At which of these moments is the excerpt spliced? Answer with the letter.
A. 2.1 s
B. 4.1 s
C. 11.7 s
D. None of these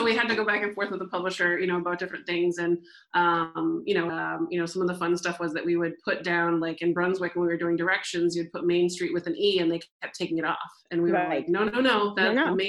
B